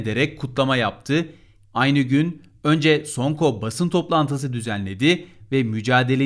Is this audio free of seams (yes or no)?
no